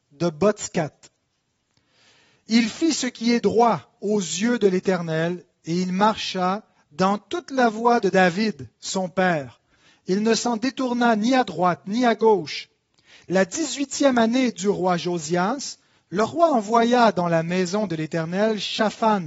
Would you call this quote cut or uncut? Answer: uncut